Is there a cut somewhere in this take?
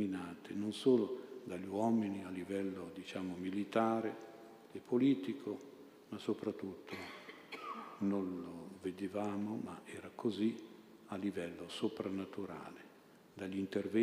no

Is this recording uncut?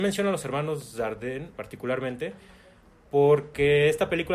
no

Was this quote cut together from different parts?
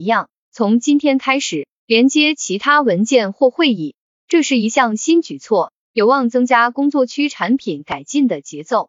yes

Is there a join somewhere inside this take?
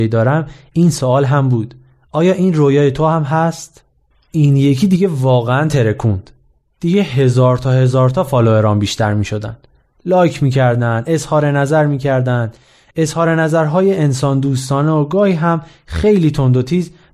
no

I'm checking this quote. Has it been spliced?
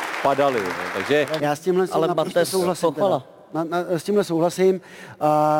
yes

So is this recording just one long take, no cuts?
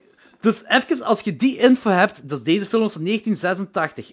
yes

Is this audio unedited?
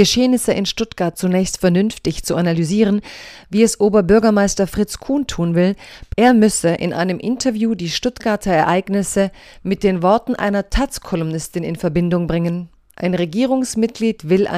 no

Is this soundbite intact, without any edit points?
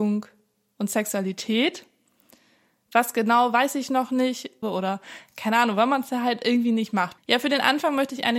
no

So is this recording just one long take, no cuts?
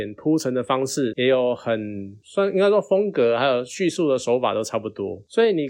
no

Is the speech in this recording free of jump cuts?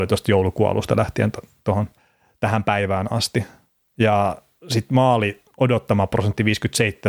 yes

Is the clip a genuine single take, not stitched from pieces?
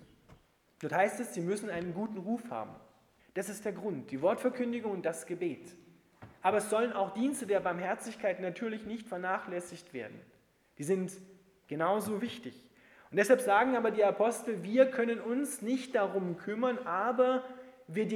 no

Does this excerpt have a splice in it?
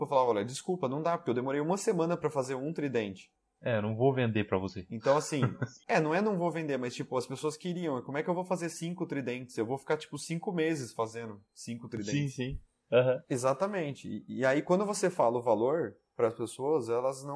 yes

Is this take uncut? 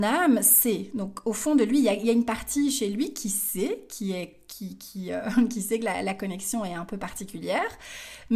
yes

